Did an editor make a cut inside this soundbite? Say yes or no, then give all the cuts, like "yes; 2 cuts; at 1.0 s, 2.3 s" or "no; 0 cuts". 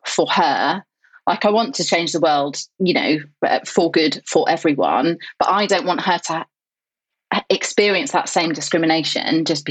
no; 0 cuts